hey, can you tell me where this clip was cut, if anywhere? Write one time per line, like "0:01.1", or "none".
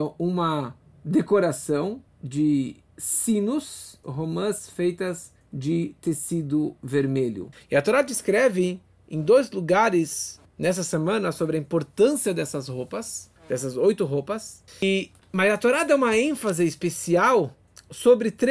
0:04.0
0:07.5